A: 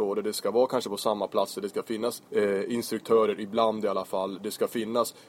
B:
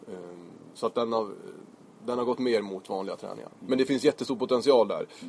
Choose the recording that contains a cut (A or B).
A